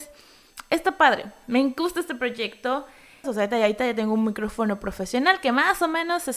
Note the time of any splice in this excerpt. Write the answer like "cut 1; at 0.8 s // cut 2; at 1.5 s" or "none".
cut 1; at 3.2 s